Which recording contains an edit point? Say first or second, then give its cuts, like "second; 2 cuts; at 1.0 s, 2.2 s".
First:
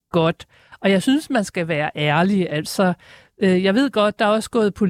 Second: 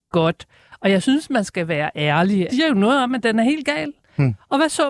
second; 1 cut; at 2.5 s